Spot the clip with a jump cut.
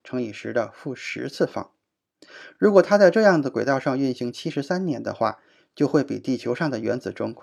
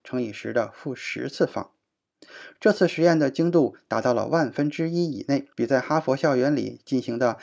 second; 2 cuts; at 2.5 s, 5.5 s

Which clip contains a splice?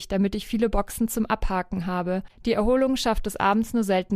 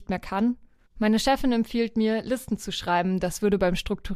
first; 1 cut; at 2.3 s

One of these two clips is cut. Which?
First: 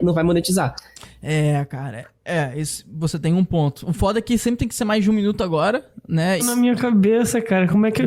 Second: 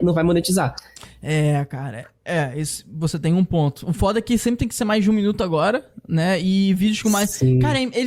first; 1 cut; at 6.4 s

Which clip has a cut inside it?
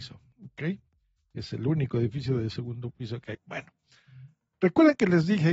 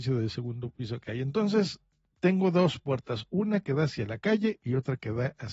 first; 1 cut; at 3.3 s

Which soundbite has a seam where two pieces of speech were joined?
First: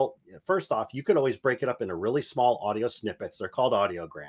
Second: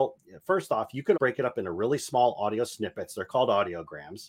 second; 1 cut; at 1.1 s

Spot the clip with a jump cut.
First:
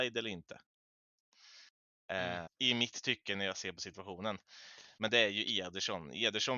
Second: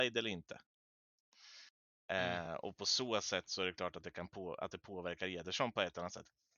first; 2 cuts; at 2.5 s, 5.0 s

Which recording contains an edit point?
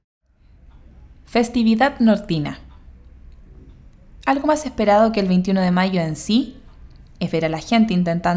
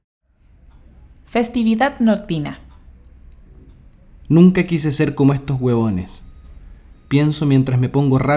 second; 1 cut; at 4.2 s

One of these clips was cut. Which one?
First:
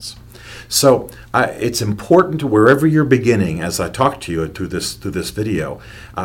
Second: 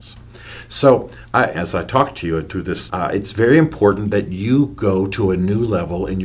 second; 2 cuts; at 1.5 s, 2.9 s

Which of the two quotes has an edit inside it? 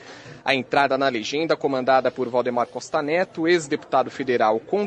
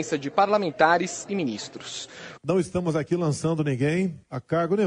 second; 1 cut; at 2.4 s

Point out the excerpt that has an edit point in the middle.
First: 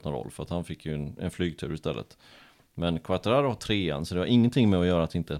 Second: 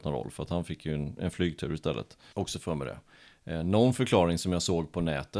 second; 1 cut; at 2.3 s

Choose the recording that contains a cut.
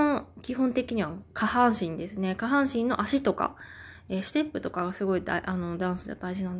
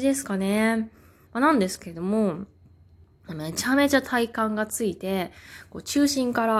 second; 1 cut; at 1.3 s

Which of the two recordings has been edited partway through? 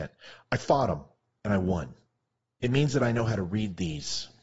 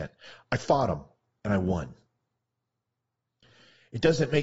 first; 1 cut; at 2.6 s

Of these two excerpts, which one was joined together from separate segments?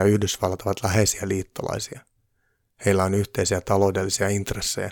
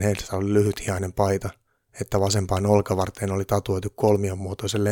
second; 1 cut; at 1.8 s

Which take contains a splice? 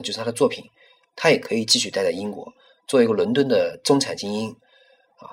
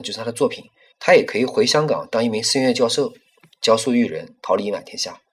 second; 1 cut; at 0.9 s

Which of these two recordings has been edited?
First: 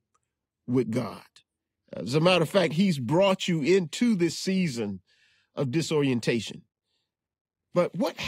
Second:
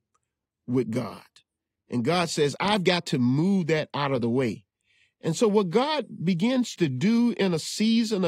first; 1 cut; at 1.8 s

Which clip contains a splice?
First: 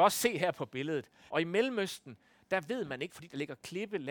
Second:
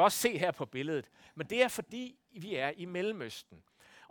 first; 2 cuts; at 1.3 s, 3.1 s

